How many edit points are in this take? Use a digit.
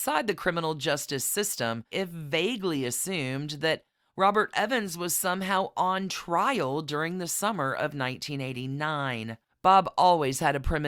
2